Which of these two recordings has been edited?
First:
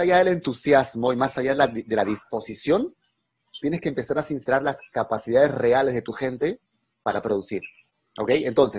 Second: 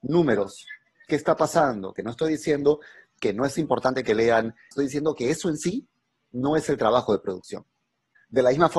second; 2 cuts; at 2.0 s, 4.7 s

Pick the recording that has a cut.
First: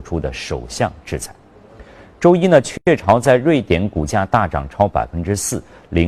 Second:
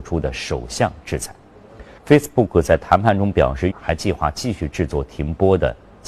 second; 2 cuts; at 2.0 s, 3.7 s

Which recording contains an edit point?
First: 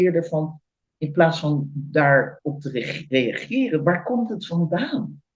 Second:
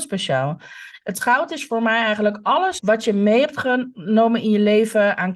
second; 2 cuts; at 1.0 s, 2.8 s

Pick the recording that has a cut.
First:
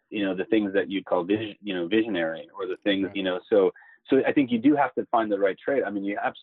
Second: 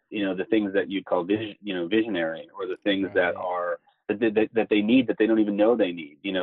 first; 1 cut; at 3.1 s

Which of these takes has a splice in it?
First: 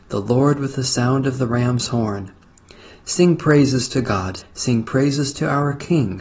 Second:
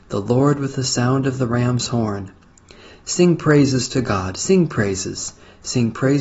first; 1 cut; at 4.4 s

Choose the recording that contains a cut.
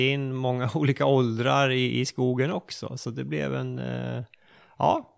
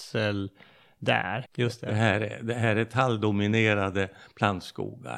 second; 1 cut; at 1.4 s

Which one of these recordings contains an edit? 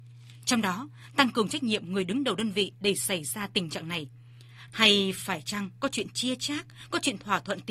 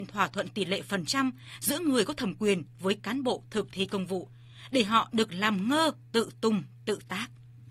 first; 1 cut; at 4.7 s

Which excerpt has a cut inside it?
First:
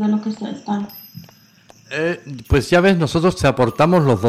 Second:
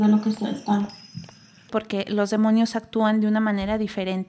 second; 1 cut; at 1.7 s

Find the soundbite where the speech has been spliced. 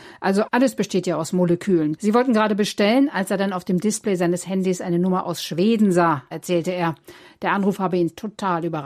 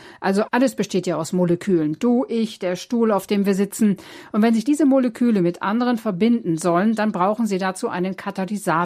first; 1 cut; at 2.0 s

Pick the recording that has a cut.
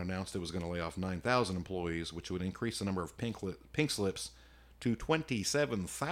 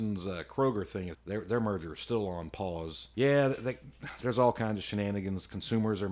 second; 2 cuts; at 1.1 s, 3.1 s

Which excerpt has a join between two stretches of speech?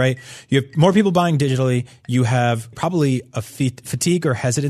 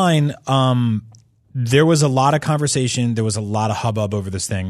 first; 1 cut; at 2.7 s

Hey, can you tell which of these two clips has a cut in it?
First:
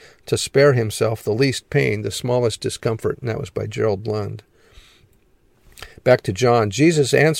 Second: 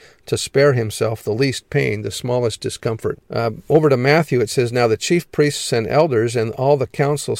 second; 1 cut; at 3.2 s

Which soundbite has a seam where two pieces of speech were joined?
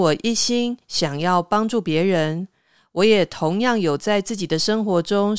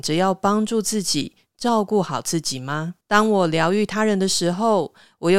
second; 1 cut; at 3.0 s

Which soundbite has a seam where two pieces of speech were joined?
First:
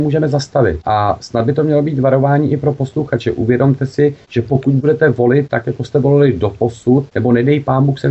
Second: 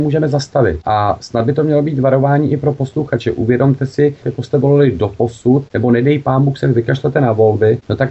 second; 1 cut; at 4.2 s

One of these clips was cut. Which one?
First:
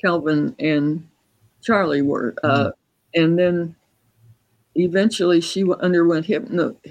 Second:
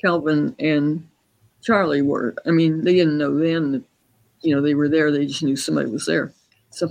first; 1 cut; at 2.4 s

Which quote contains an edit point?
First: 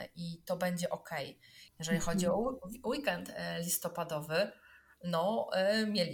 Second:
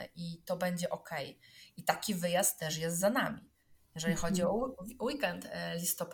first; 1 cut; at 1.7 s

